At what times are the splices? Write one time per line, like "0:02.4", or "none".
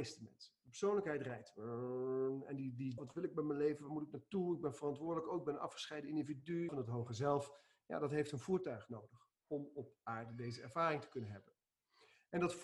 0:03.0
0:06.7